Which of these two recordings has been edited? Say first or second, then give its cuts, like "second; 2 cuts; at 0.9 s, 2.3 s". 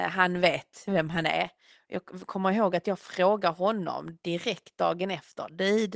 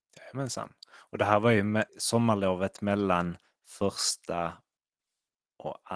second; 1 cut; at 1.9 s